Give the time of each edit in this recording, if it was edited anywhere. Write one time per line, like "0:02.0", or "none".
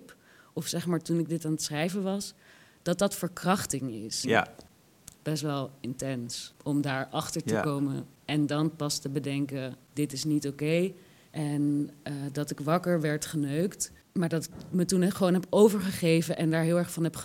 0:04.2
0:11.3